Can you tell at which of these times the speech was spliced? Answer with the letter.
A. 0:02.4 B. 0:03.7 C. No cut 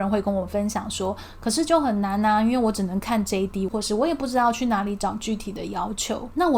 B